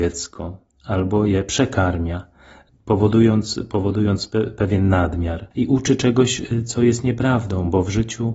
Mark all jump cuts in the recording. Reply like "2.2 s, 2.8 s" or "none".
5.5 s